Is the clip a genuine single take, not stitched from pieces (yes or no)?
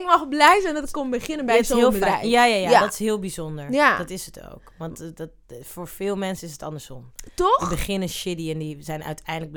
yes